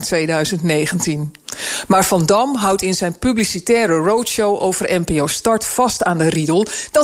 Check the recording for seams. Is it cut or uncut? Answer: uncut